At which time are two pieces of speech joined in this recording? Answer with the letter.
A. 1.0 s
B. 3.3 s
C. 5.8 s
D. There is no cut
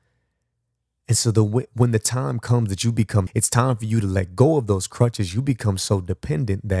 B